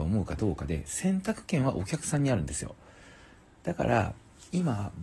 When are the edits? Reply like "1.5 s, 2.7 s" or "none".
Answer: none